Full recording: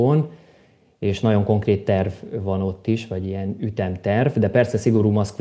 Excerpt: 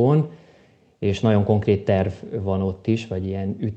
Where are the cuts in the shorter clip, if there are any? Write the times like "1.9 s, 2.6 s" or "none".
none